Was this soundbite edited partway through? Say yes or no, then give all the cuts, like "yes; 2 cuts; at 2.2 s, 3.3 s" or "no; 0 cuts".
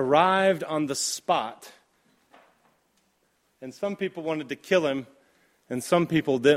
no; 0 cuts